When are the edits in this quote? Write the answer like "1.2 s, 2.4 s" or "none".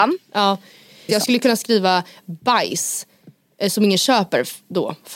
1.1 s

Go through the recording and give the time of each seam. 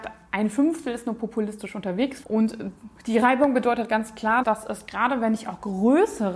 2.2 s, 4.4 s

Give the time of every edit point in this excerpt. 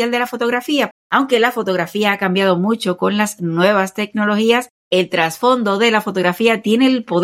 0.9 s, 4.8 s

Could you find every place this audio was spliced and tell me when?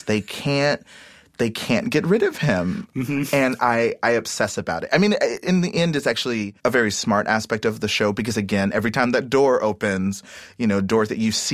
6.6 s

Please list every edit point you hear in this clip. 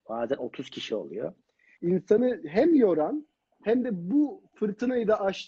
1.8 s

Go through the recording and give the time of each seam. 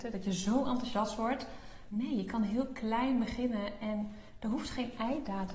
1.9 s

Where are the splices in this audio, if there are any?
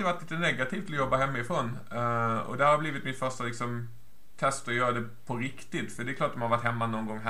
none

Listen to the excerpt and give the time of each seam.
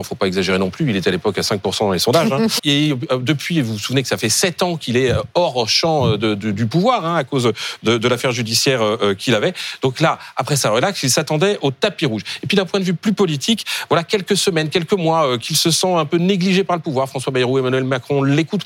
2.6 s

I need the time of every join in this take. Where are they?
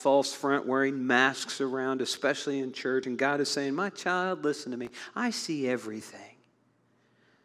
none

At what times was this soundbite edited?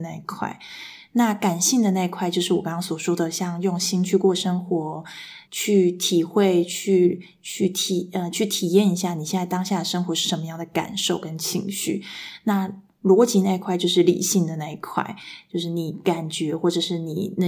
5.5 s

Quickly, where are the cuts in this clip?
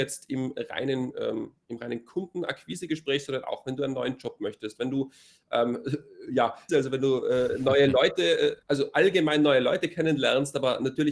6.7 s, 8.6 s

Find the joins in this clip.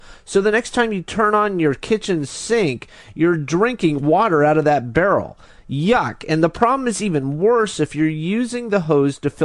none

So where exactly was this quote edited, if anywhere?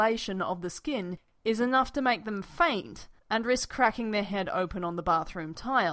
1.4 s, 3.2 s

